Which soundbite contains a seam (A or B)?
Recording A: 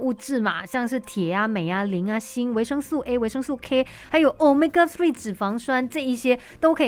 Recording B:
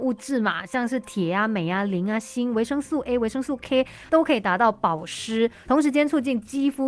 B